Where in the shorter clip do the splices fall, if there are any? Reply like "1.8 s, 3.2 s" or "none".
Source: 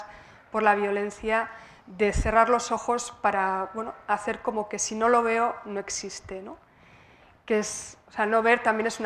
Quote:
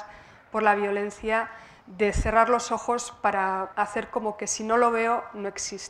3.7 s